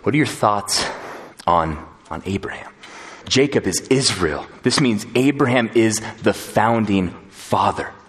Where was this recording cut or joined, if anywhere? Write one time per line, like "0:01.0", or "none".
0:03.2